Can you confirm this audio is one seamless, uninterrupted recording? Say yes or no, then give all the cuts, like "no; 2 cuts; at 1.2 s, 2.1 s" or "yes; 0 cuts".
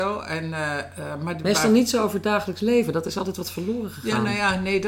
yes; 0 cuts